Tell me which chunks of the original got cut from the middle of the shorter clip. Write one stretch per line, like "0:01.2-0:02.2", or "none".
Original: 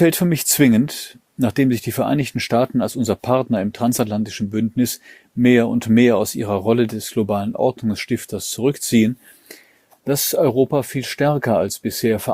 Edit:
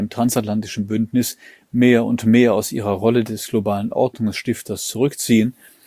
none